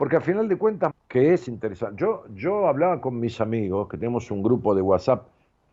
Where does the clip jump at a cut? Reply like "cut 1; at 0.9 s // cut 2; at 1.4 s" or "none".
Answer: cut 1; at 0.9 s